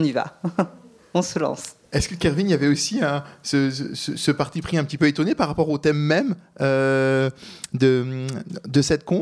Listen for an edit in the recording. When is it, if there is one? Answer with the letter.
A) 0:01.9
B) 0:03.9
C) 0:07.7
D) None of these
A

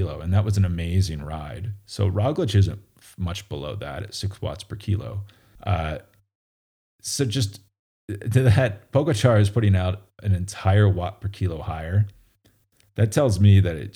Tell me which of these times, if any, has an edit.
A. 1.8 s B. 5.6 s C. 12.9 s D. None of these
B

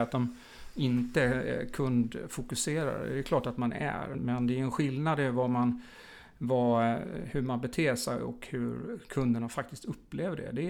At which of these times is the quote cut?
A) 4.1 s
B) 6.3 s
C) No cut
A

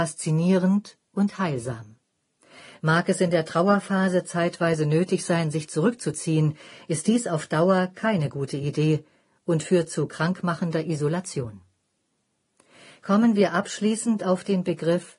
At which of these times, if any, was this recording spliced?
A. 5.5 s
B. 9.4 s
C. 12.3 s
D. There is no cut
D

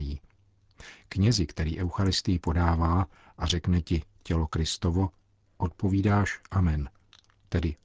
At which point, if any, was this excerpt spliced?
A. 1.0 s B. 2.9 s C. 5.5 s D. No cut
D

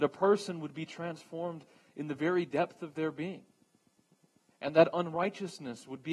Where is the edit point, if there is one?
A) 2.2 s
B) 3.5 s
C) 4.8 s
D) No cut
D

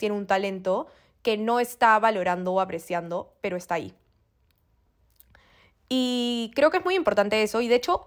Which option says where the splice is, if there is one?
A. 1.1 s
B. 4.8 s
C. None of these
C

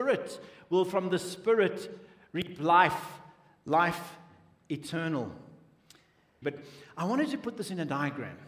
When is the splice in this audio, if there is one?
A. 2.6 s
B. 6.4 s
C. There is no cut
B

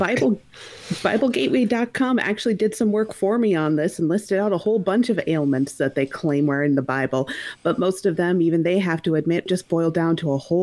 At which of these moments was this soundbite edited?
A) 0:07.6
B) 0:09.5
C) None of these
B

